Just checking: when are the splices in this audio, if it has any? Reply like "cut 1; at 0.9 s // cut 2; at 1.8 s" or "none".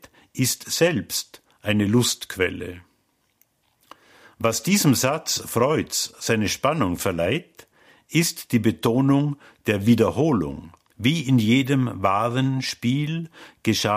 cut 1; at 10.9 s